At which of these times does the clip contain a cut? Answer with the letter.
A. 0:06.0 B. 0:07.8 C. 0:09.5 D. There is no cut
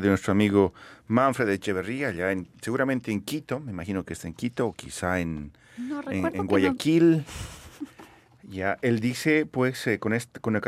D